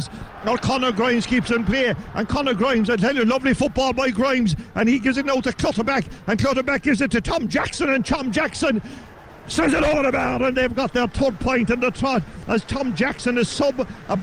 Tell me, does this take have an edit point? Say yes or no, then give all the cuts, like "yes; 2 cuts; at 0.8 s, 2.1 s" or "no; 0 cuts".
no; 0 cuts